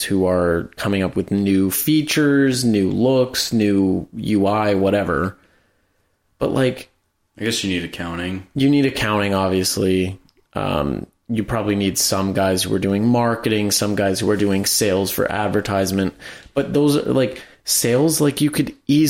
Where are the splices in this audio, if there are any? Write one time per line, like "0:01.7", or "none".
none